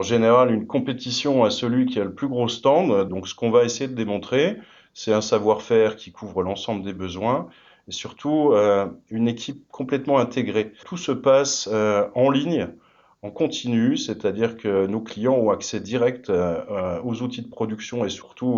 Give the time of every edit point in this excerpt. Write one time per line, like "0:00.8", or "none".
0:03.1
0:10.8

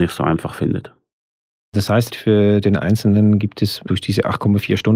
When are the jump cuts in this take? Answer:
none

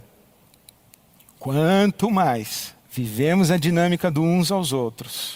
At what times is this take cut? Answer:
0:02.8

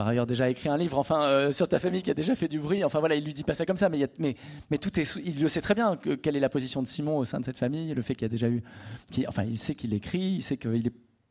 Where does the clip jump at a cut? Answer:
none

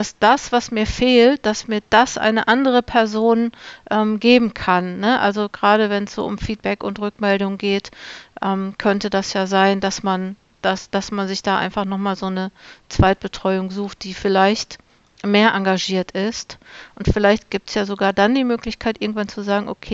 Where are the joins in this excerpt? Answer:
none

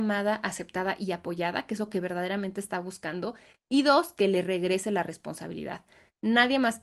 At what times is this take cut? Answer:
none

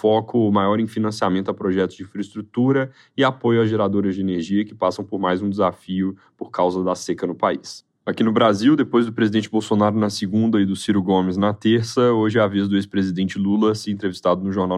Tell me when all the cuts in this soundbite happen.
0:08.0

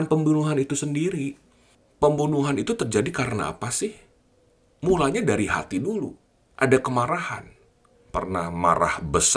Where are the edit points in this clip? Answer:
0:07.9

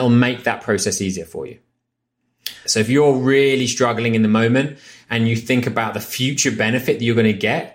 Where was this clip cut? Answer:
0:02.7

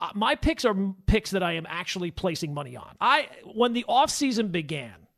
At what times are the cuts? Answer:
0:03.0

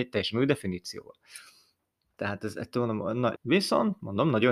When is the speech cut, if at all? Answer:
0:02.2
0:03.4

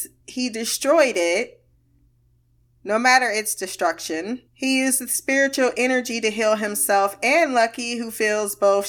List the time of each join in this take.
0:04.5

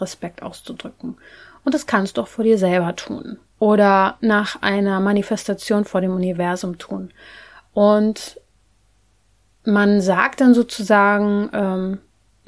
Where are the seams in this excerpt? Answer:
none

